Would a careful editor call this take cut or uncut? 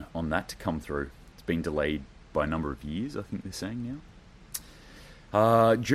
uncut